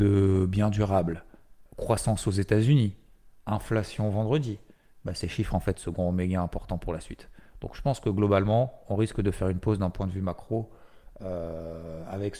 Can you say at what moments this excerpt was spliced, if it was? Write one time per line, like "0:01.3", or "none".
0:01.7